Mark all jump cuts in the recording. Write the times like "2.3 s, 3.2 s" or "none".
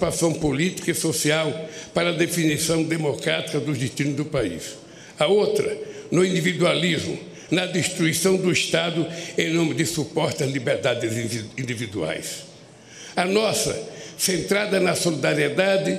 7.5 s, 13.1 s